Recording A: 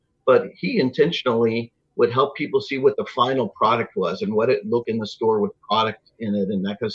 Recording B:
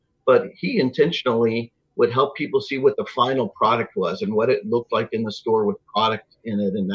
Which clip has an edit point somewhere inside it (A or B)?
A